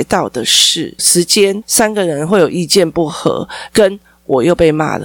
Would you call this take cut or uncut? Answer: cut